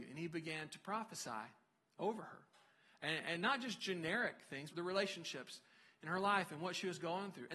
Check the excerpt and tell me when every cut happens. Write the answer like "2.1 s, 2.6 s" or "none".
4.7 s